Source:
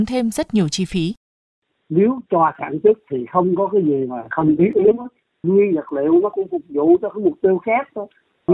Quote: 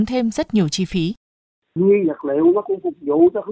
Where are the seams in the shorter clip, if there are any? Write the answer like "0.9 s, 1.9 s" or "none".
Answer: 1.7 s

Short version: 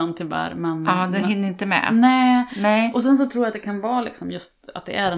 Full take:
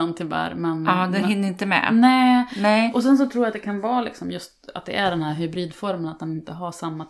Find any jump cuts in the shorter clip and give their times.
none

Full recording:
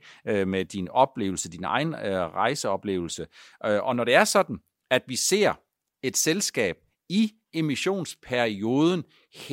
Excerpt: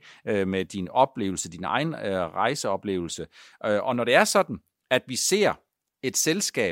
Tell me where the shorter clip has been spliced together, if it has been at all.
none

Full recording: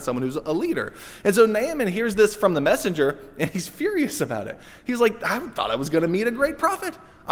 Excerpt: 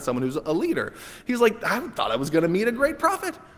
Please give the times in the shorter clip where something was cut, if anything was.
1.2 s

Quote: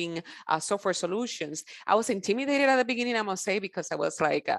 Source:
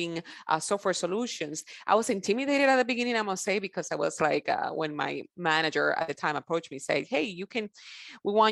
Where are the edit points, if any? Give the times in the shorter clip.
none

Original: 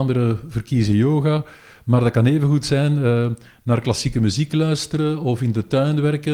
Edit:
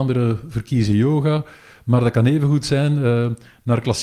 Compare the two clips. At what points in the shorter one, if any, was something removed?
none

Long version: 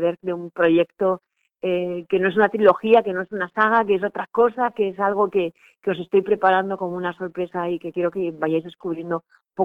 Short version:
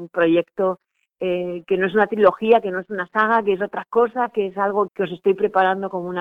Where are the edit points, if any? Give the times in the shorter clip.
4.9 s

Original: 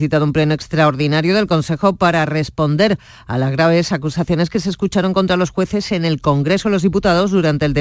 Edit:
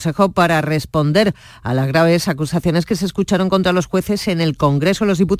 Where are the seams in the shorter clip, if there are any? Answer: none

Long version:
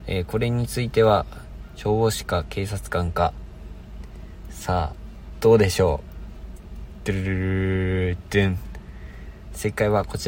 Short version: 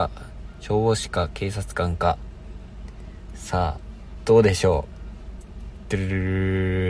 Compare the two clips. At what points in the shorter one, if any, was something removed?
none

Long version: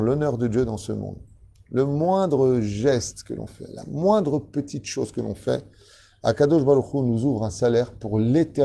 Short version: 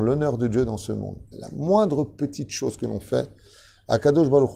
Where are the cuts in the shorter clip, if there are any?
1.3 s

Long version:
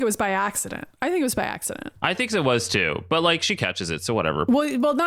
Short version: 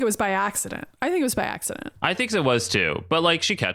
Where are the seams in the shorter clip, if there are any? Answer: none

